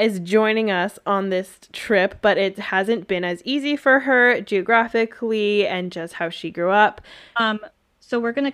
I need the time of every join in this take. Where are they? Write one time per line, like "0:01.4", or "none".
0:07.4